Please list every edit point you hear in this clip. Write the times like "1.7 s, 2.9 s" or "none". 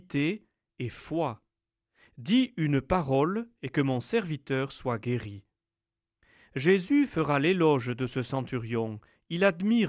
none